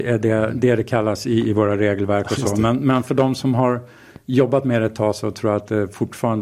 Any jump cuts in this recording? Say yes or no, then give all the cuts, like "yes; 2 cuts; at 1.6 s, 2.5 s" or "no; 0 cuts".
no; 0 cuts